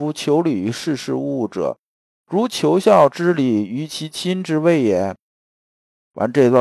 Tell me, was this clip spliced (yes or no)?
no